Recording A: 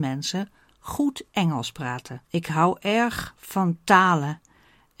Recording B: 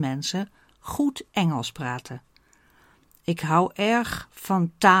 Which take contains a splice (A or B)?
A